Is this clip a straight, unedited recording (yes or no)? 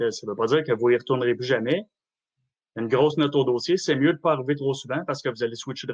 yes